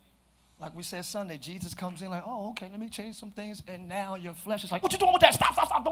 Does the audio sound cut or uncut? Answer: cut